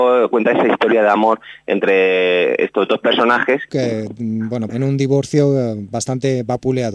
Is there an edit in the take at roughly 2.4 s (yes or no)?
no